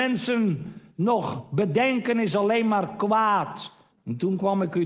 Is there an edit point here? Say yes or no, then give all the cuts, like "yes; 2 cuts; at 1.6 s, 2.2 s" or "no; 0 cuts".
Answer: yes; 1 cut; at 3.9 s